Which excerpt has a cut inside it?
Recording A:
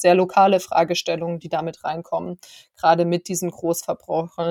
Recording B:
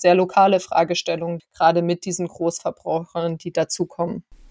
B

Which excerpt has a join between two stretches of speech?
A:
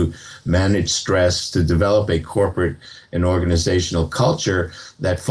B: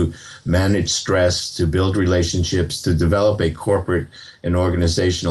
A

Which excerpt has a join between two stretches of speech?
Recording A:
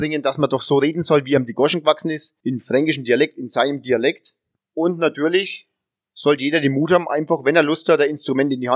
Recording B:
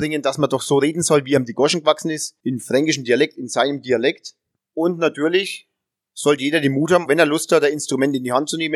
B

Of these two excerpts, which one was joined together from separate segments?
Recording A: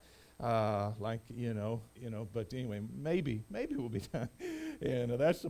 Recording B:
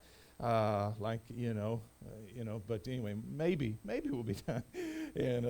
A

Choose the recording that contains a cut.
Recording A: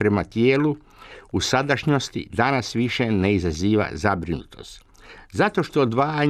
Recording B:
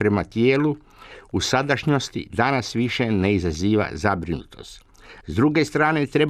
B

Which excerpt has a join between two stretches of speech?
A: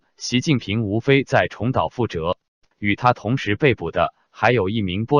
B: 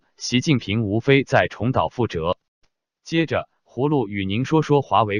A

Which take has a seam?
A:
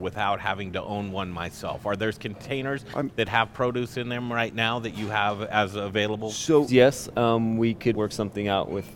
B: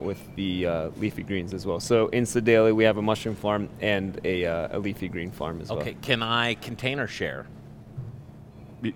A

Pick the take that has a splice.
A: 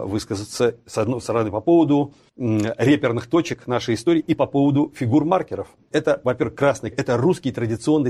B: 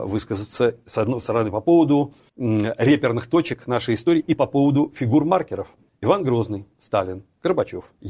A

